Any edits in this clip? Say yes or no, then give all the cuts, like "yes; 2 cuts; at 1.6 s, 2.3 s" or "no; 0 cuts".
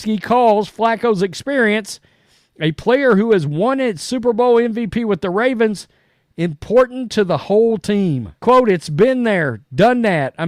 yes; 1 cut; at 8.4 s